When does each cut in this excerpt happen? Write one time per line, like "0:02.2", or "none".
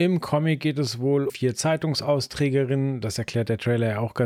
0:01.3